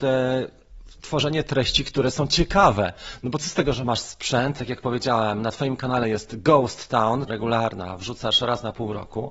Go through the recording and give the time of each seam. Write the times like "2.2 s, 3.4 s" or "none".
4.6 s, 7.3 s